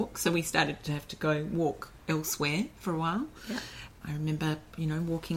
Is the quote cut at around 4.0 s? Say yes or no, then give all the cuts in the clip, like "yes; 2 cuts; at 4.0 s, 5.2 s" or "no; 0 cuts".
yes; 1 cut; at 4.0 s